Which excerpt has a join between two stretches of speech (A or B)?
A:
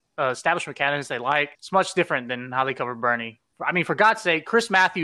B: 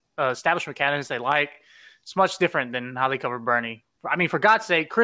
A